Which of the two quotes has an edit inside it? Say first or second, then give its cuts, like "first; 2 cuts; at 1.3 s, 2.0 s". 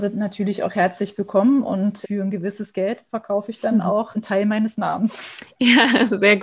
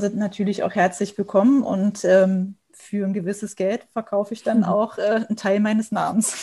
first; 2 cuts; at 2.0 s, 4.1 s